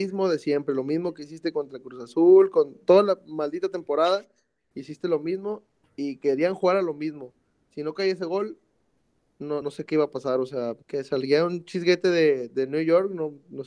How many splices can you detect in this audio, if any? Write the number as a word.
two